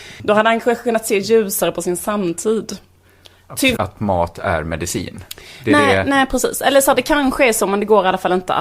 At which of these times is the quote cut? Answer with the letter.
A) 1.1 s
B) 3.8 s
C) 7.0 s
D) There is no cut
B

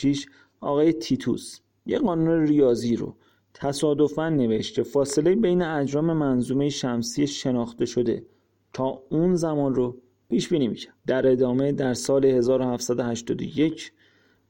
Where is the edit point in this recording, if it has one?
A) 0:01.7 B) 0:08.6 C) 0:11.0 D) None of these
C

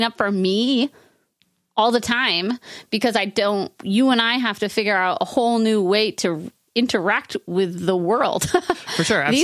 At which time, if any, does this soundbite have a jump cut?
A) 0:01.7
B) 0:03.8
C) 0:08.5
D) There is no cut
B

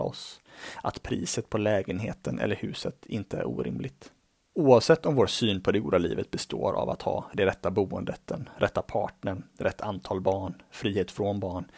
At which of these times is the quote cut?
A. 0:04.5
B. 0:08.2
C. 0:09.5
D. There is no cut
A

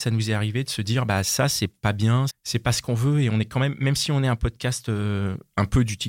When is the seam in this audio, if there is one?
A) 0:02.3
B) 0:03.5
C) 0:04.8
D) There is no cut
A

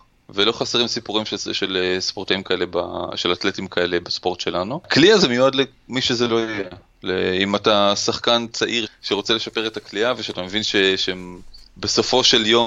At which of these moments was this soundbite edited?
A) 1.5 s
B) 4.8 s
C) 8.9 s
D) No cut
C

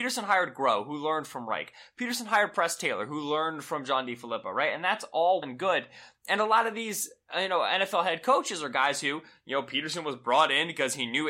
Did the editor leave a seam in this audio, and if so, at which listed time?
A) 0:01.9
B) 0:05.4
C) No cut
B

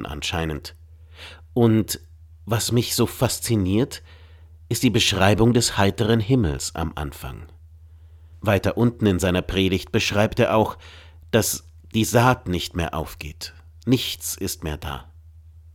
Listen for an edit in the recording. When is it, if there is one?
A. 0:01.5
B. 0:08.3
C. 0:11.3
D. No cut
B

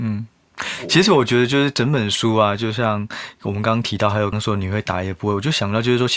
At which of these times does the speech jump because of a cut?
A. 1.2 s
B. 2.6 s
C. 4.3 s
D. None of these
C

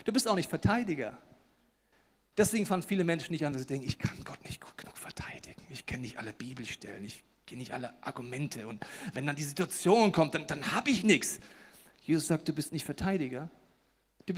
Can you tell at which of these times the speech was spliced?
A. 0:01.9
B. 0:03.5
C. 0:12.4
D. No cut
B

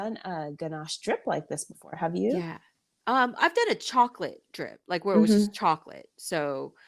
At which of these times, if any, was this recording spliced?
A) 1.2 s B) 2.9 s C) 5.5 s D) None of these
D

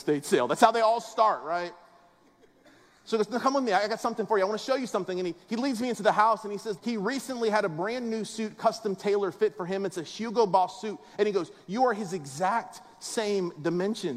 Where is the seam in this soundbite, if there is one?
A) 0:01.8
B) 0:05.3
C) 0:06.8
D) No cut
C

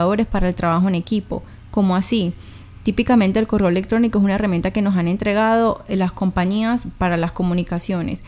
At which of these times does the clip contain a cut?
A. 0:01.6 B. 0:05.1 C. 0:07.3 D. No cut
A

